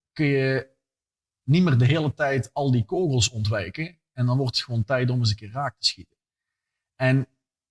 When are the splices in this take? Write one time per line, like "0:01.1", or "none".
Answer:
none